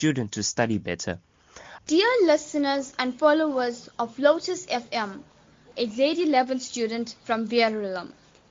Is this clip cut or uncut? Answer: cut